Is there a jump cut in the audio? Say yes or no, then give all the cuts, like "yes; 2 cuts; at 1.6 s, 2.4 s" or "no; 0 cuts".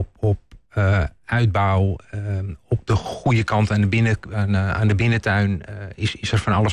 no; 0 cuts